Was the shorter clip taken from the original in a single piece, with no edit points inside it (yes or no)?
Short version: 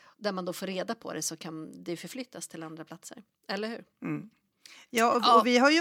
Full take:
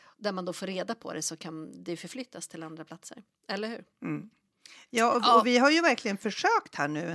yes